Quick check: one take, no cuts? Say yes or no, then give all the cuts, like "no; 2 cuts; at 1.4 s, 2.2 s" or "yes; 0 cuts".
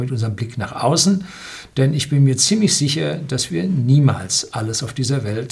yes; 0 cuts